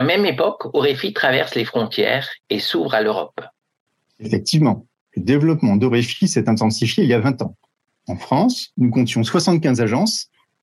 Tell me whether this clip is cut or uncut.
uncut